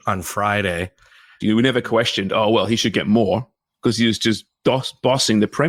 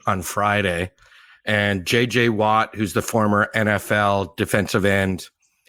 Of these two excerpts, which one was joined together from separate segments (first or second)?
first